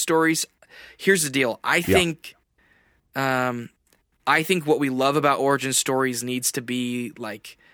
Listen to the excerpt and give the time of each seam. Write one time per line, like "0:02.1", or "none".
none